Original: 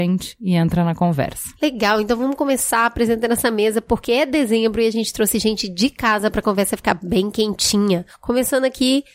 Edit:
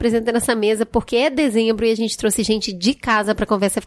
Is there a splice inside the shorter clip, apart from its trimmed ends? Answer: no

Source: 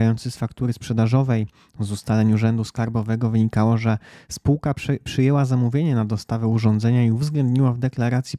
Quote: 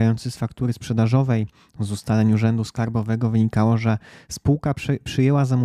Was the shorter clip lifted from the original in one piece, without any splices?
yes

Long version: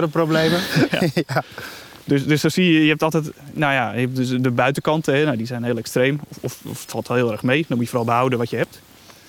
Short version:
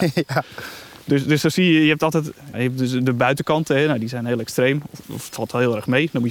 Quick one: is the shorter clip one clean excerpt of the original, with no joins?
no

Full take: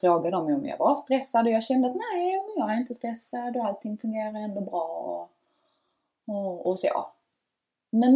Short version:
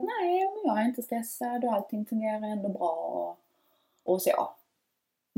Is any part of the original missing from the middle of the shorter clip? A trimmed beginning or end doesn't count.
yes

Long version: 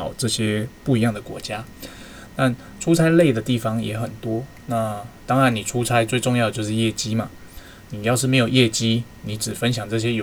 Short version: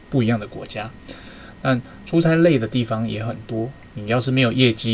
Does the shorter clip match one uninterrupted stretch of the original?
no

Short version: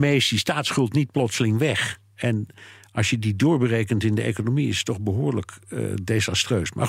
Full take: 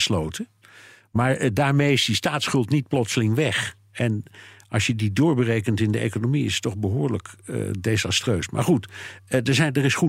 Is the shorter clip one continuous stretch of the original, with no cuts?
yes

